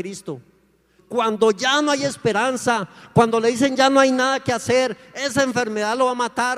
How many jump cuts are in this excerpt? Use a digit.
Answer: 1